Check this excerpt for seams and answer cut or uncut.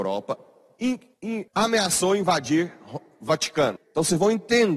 cut